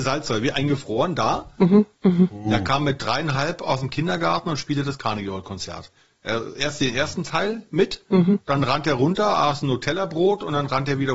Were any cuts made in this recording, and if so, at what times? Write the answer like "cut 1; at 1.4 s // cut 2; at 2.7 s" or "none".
cut 1; at 1.9 s

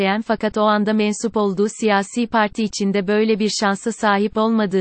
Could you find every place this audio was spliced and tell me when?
none

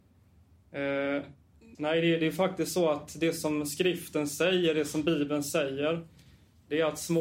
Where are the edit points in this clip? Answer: cut 1; at 1.8 s

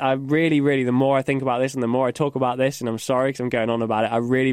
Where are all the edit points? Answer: none

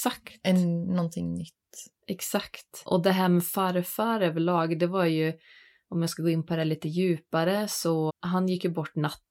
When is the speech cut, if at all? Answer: cut 1; at 8.1 s

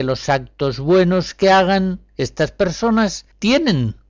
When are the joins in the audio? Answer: none

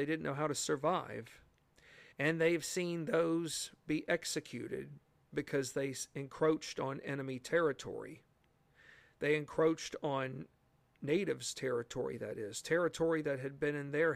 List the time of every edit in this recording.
cut 1; at 2.1 s

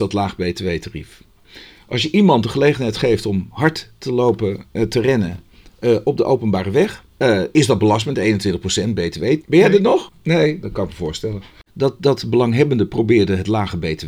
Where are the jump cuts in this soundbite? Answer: cut 1; at 9.4 s // cut 2; at 11.7 s

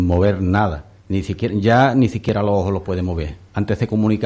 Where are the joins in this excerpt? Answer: none

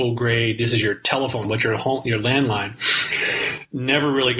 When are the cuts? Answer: cut 1; at 1.4 s

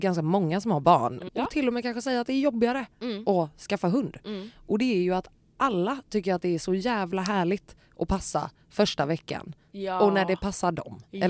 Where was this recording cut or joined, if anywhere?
cut 1; at 1.3 s

